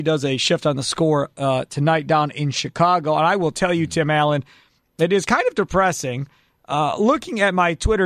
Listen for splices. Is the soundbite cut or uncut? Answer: uncut